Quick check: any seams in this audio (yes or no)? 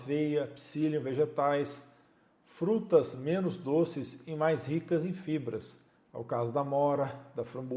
no